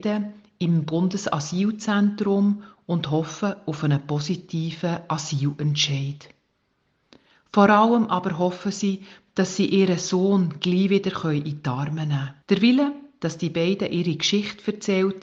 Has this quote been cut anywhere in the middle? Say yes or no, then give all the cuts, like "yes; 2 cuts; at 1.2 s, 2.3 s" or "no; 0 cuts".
yes; 1 cut; at 12.4 s